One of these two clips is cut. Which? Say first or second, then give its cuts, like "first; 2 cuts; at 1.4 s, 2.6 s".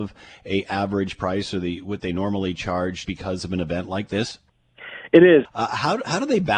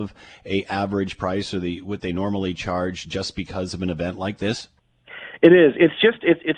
first; 2 cuts; at 3.0 s, 5.4 s